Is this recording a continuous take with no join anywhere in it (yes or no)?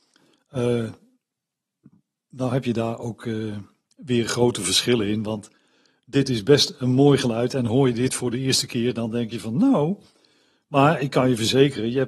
yes